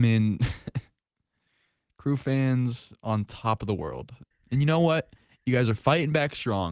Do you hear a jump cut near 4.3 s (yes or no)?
yes